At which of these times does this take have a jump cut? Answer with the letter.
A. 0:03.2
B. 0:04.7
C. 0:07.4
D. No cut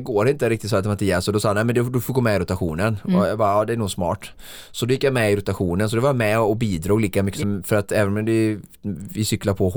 C